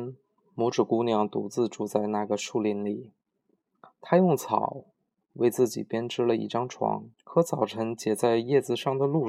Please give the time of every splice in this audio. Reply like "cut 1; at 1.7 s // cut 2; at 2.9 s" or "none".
cut 1; at 7.1 s